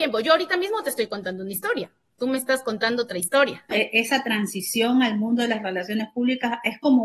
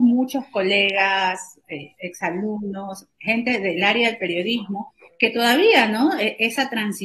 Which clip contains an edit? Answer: first; 1 cut; at 3.7 s

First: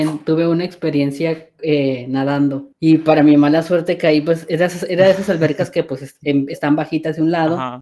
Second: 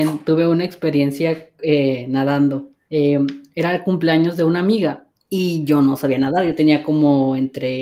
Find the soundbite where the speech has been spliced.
first; 1 cut; at 2.7 s

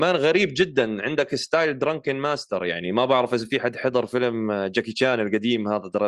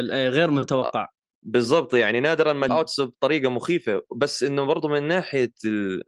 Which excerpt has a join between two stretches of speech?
second; 1 cut; at 2.7 s

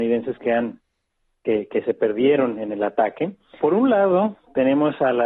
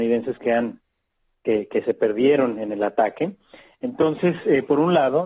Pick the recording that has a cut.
first; 1 cut; at 3.6 s

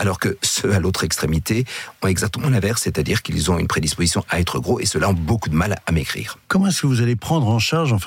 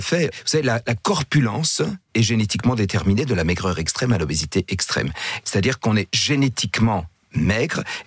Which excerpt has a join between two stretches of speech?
second; 1 cut; at 5.4 s

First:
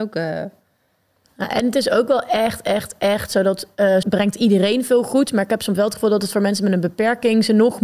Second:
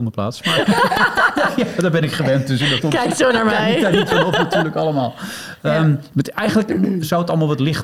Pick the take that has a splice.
first; 1 cut; at 4.0 s

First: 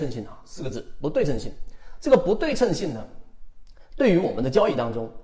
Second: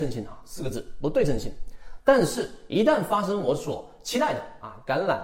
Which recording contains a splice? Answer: second; 1 cut; at 2.0 s

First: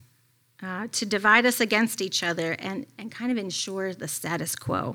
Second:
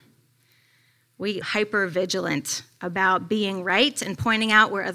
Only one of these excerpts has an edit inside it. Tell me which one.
second; 1 cut; at 1.4 s

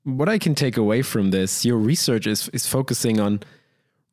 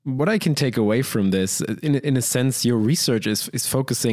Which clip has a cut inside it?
first; 1 cut; at 1.6 s

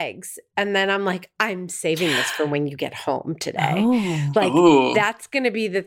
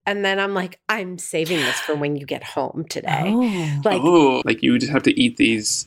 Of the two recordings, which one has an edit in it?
second; 1 cut; at 4.4 s

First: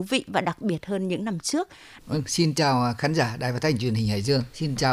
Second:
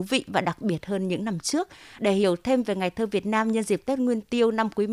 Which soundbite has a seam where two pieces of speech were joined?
first; 1 cut; at 2.0 s

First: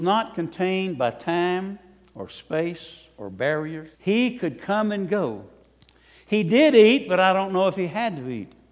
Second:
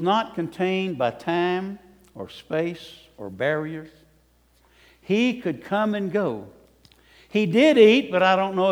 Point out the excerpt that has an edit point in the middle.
first; 1 cut; at 3.9 s

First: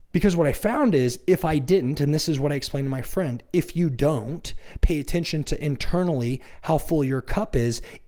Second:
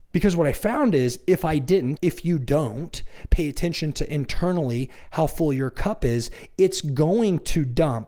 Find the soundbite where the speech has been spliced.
second; 1 cut; at 2.0 s

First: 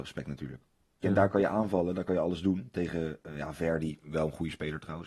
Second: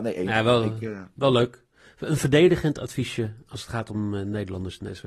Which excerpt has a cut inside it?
first; 1 cut; at 1.0 s

